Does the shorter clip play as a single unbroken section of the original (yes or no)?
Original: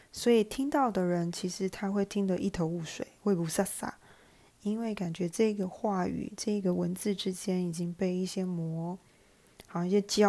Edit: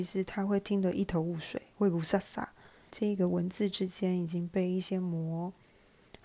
no